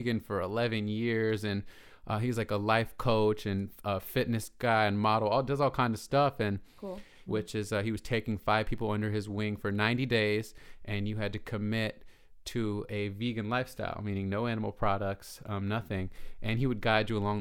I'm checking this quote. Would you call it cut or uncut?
cut